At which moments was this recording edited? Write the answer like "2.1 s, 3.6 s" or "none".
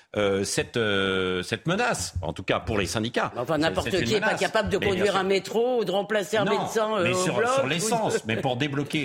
none

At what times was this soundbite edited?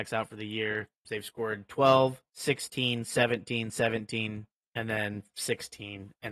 1.0 s, 2.3 s, 4.6 s

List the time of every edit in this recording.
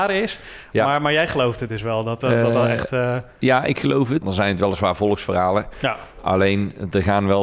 4.2 s

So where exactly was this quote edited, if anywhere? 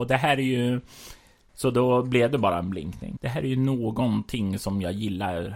1.5 s, 3.2 s

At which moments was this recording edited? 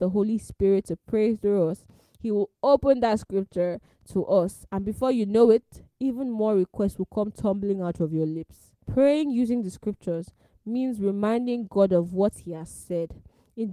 none

